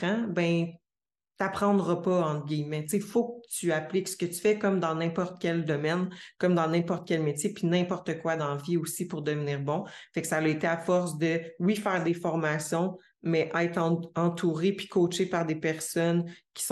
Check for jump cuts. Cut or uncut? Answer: uncut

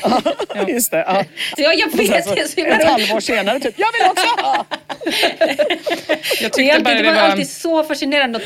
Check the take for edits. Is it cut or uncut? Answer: cut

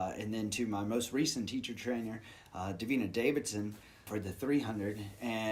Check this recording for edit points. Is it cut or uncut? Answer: cut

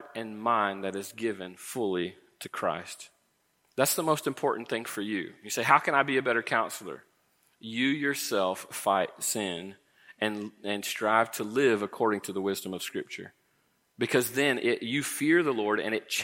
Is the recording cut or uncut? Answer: uncut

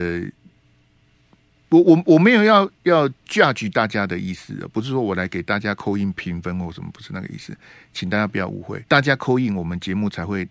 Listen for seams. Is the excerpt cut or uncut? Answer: cut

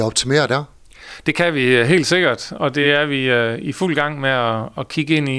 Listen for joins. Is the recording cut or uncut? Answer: uncut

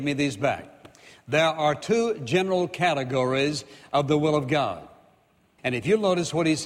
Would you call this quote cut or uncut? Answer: cut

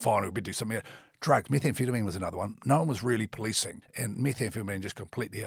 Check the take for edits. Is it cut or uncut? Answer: cut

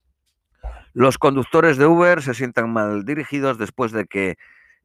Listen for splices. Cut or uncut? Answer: uncut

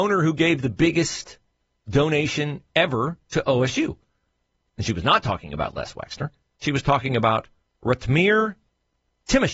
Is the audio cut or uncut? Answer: uncut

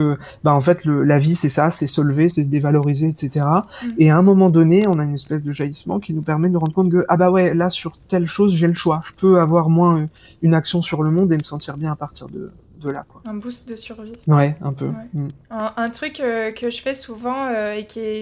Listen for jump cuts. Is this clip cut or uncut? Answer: cut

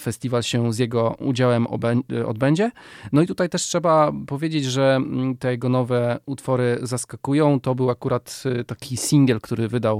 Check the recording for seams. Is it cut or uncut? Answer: uncut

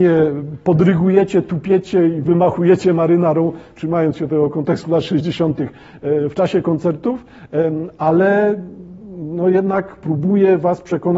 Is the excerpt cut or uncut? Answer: uncut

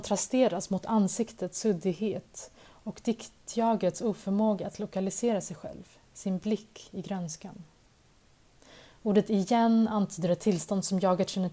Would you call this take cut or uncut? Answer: uncut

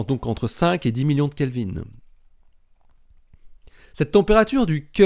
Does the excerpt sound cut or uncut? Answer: uncut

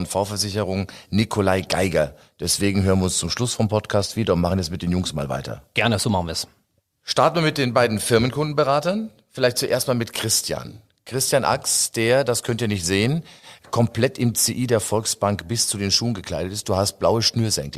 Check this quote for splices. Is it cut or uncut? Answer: uncut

